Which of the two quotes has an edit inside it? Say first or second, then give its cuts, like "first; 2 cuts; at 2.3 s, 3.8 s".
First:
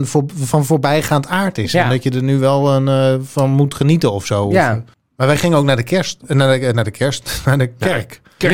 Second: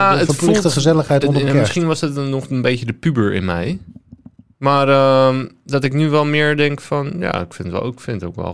second; 1 cut; at 4.5 s